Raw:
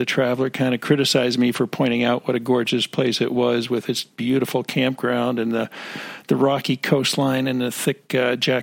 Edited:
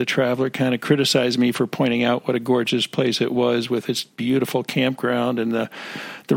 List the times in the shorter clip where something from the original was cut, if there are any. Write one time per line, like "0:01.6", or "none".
none